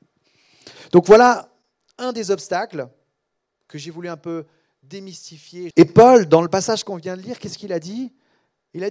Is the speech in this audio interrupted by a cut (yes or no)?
yes